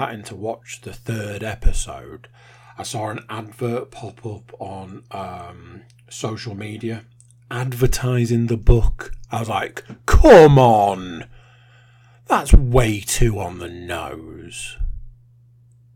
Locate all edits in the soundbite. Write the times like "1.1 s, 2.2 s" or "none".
none